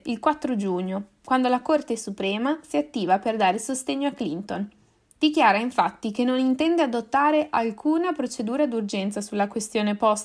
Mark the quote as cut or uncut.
uncut